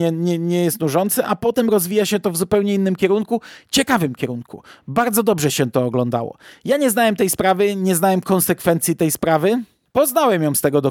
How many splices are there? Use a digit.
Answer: 1